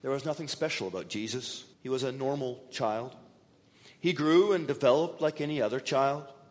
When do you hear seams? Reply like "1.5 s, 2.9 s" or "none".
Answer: 1.7 s